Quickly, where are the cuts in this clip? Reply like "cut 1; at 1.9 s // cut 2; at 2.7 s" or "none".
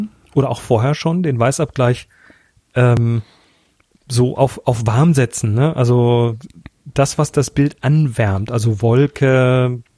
none